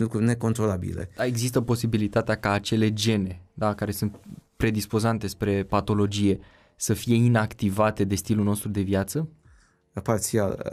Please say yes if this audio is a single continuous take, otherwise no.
yes